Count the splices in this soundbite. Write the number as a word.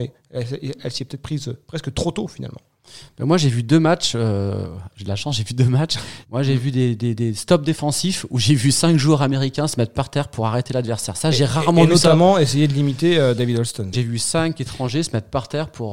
two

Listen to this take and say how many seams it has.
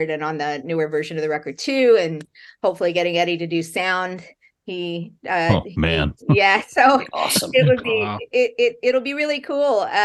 two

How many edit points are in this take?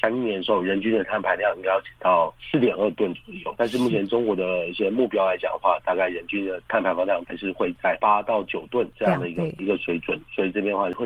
zero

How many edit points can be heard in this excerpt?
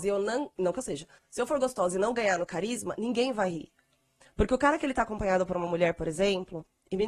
one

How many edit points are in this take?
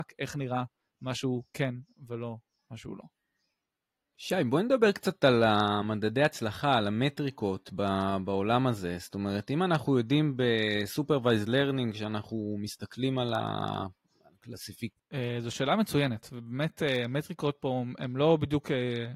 one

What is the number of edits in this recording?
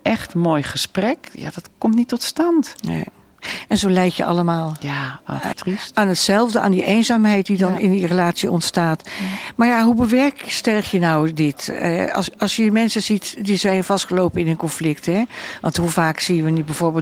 one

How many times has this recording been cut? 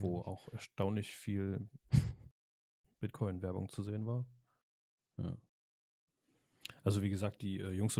zero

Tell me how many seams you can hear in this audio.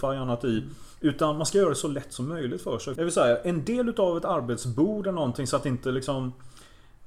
one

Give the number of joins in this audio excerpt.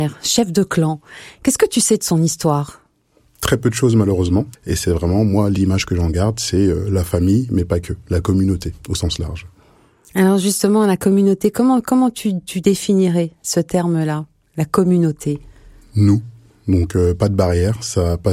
one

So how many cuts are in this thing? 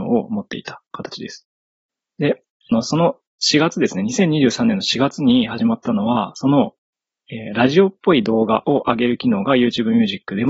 zero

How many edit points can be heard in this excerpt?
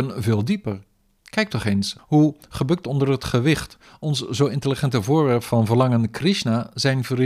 one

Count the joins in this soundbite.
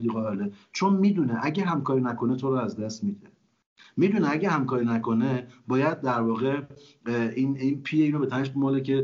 zero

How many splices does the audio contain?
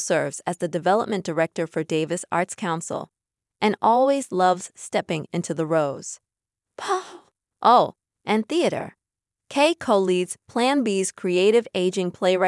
one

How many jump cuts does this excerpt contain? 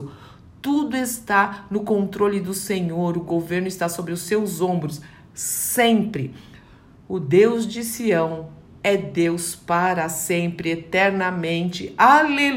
zero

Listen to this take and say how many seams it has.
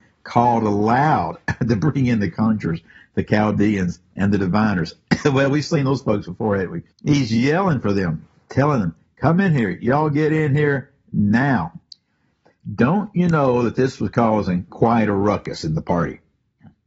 one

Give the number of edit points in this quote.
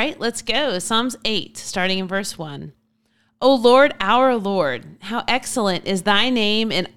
zero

